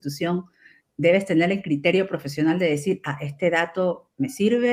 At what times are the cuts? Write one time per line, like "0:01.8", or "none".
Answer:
none